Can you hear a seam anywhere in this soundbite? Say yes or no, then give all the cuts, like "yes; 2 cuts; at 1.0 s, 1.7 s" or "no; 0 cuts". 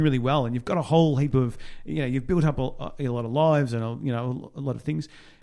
no; 0 cuts